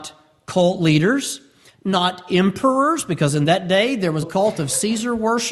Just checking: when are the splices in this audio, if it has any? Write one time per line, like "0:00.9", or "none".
0:04.2

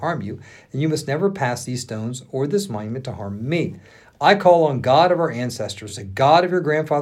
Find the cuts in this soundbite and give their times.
none

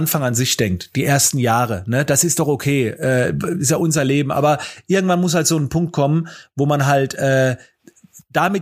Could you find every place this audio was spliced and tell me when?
none

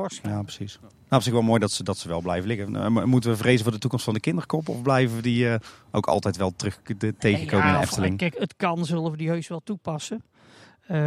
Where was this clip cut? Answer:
0:08.3

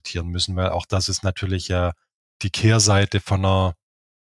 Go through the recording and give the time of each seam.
none

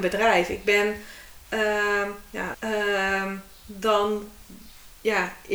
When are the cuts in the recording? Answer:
0:02.5

